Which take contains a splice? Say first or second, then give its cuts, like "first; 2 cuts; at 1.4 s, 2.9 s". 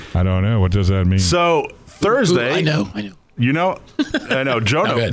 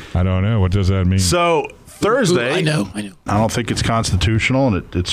second; 1 cut; at 3.3 s